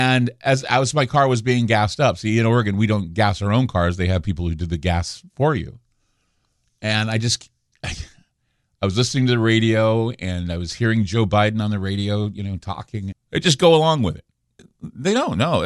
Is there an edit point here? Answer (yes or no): yes